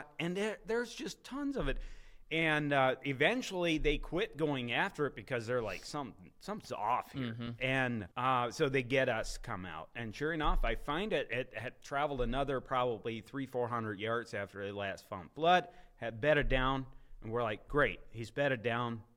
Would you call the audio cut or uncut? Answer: cut